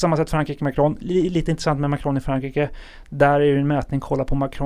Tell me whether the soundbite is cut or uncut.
cut